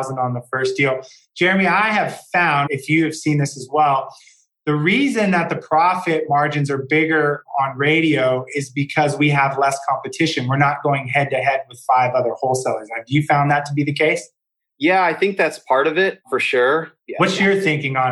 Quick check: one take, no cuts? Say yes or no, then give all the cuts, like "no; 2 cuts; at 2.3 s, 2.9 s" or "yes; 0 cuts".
no; 1 cut; at 2.7 s